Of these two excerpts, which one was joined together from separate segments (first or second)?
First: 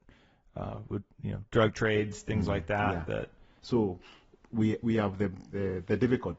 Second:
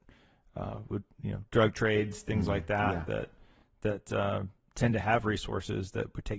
first